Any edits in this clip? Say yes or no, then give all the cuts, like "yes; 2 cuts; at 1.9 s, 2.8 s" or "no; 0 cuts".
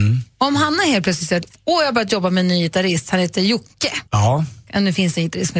yes; 1 cut; at 4.1 s